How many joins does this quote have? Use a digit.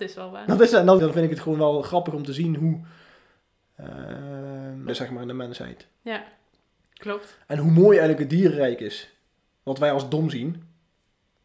2